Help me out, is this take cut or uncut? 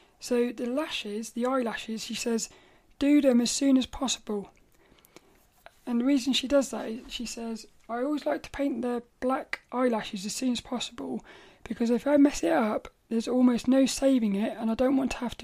uncut